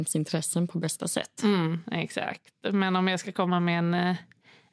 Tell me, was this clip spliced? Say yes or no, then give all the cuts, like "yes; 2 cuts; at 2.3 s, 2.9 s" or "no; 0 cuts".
no; 0 cuts